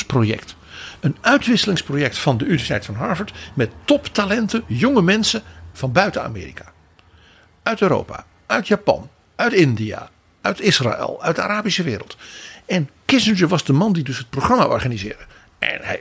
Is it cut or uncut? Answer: uncut